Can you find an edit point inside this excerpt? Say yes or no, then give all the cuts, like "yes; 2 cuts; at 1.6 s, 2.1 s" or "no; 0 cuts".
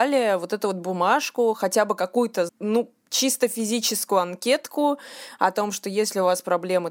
yes; 1 cut; at 2.5 s